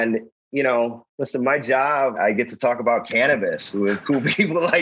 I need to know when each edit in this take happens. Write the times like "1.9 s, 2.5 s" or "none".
2.1 s